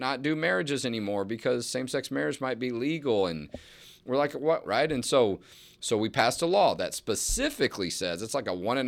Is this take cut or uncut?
cut